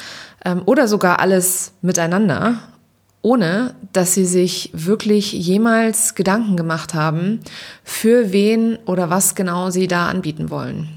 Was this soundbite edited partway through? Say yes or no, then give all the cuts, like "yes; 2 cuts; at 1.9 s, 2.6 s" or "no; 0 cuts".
no; 0 cuts